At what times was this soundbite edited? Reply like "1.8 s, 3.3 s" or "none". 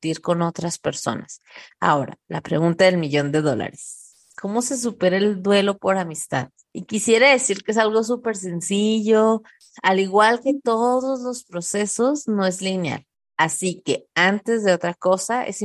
1.7 s